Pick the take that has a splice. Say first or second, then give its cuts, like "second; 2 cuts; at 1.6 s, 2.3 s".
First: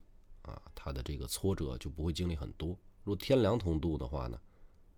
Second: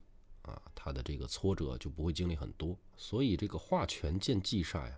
second; 1 cut; at 2.9 s